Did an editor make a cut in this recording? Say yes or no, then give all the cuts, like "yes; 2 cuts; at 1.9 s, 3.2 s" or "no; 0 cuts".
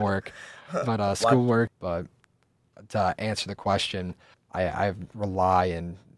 yes; 2 cuts; at 1.7 s, 4.3 s